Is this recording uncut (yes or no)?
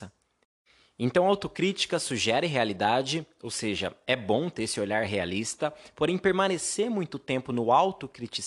yes